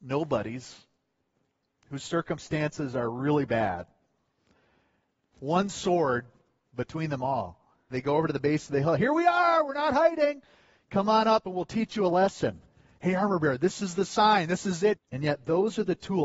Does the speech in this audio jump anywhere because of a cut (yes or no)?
yes